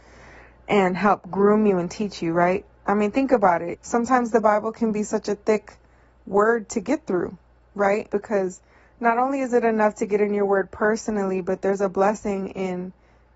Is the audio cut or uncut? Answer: cut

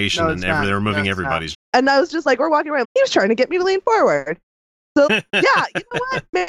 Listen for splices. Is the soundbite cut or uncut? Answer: cut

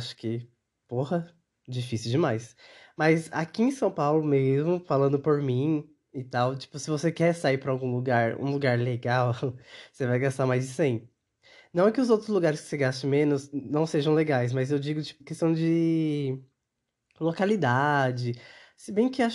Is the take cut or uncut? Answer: cut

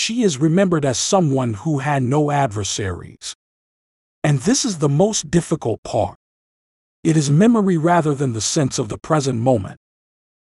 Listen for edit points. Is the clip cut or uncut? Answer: uncut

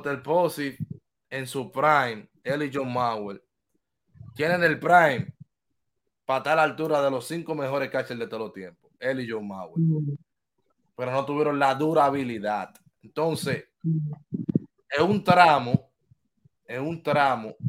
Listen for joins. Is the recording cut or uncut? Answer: uncut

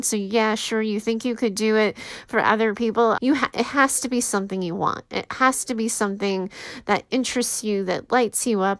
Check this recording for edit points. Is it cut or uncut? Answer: cut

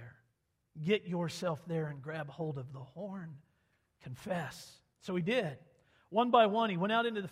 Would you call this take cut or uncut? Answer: cut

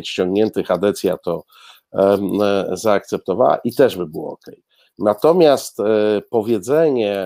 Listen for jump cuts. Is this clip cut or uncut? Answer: uncut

